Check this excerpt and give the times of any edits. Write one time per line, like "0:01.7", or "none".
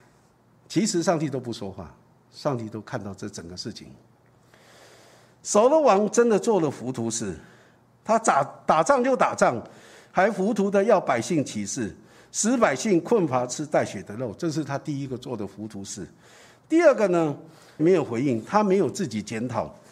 0:17.8